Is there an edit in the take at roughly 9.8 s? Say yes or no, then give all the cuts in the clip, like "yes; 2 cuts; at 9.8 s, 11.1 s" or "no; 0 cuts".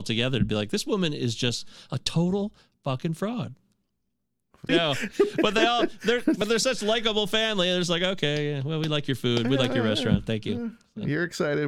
no; 1 cut; at 4.7 s